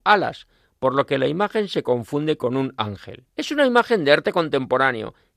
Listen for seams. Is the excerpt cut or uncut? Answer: cut